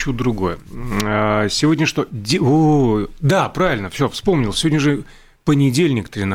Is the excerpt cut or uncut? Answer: uncut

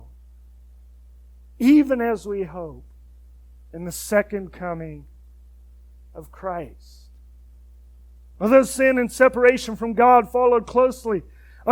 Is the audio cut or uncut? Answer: cut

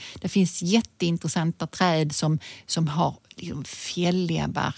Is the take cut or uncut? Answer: uncut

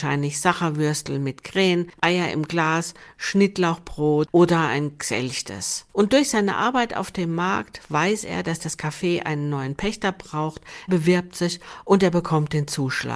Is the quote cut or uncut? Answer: cut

